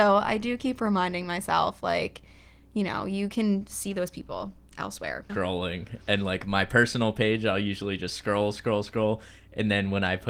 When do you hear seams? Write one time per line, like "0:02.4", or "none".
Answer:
0:05.3